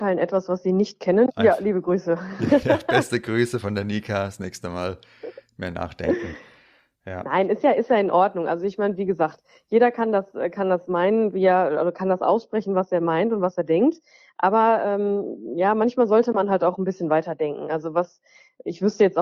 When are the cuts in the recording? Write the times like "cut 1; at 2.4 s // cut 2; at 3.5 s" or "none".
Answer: cut 1; at 1.3 s